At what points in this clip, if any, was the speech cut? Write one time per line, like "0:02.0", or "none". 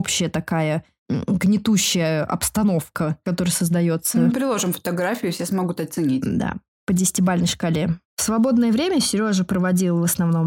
none